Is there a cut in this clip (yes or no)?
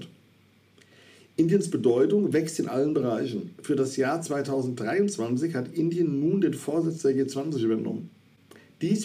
no